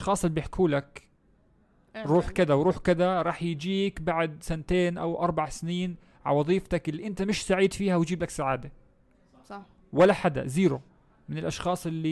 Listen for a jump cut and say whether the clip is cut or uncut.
uncut